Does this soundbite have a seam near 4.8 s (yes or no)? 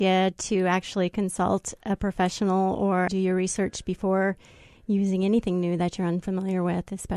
no